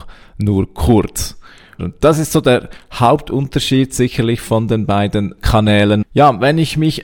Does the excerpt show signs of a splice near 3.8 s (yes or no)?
no